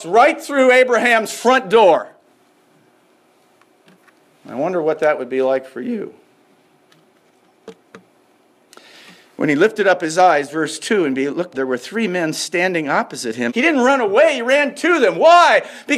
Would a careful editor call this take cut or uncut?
cut